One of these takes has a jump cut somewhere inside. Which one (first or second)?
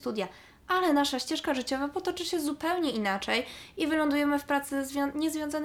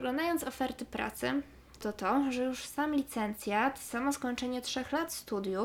second